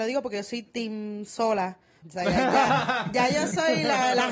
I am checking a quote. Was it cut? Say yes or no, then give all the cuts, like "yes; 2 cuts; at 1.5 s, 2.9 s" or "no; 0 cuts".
yes; 1 cut; at 2.0 s